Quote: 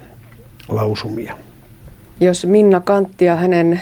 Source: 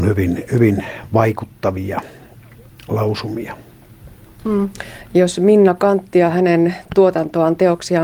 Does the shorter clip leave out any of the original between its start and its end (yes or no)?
yes